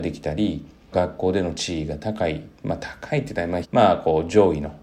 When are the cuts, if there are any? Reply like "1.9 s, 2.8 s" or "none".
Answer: 0.9 s, 2.6 s, 3.6 s